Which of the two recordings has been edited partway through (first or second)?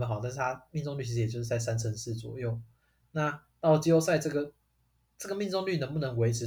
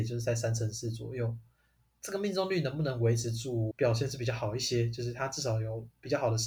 second